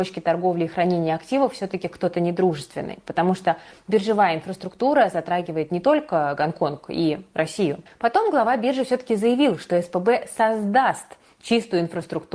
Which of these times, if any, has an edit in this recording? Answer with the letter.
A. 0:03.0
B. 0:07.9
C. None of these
B